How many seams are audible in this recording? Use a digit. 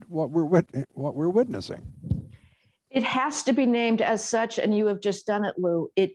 0